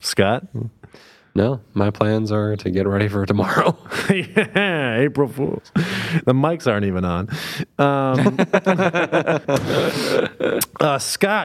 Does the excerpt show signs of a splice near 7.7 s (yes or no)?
no